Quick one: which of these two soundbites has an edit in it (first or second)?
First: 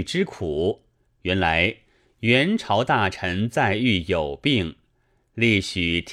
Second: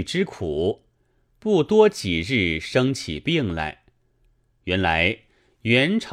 first